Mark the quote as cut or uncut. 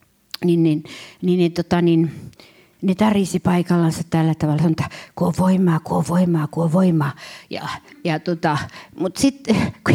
uncut